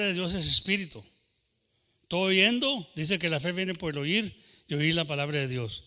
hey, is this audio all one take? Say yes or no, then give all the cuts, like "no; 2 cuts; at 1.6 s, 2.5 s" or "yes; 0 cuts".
yes; 0 cuts